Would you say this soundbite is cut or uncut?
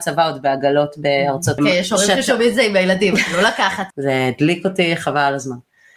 cut